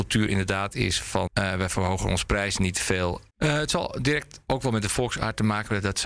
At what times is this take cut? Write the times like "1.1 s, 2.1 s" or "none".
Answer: 1.3 s, 3.3 s